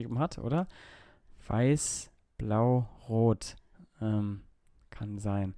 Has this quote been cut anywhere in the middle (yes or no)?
no